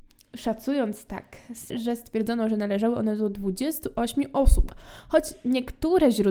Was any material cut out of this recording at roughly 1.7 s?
yes; 1 cut; at 1.7 s

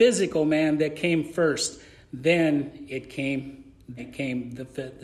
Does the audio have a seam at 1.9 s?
no; 1 cut; at 4.0 s

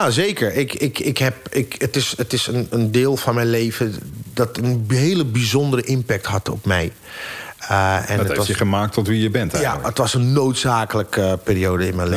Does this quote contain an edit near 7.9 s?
no; 0 cuts

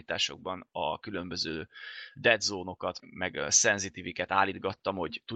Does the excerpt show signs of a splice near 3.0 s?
yes; 1 cut; at 3.0 s

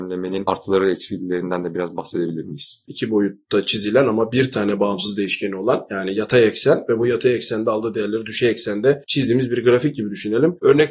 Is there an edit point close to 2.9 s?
yes; 1 cut; at 2.9 s

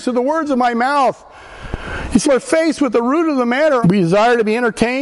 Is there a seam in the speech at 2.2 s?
yes; 2 cuts; at 2.2 s, 3.8 s

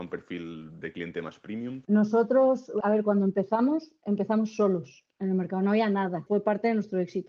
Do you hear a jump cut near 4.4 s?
no; 1 cut; at 2.8 s

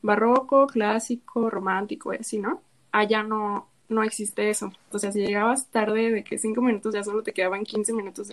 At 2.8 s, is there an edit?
no; 1 cut; at 4.9 s

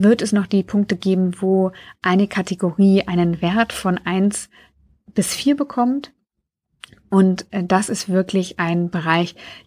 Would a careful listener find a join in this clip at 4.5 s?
no; 0 cuts

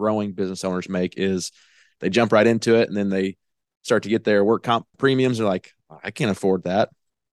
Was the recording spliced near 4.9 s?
yes; 1 cut; at 4.9 s

